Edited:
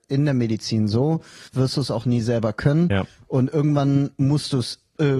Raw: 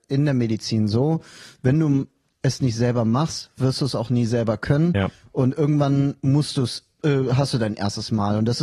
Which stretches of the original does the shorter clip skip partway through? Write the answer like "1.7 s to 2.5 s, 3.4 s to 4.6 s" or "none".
1.5 s to 3.5 s